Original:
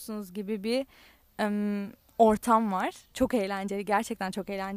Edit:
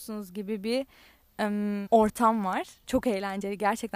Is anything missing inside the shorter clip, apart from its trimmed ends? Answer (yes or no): yes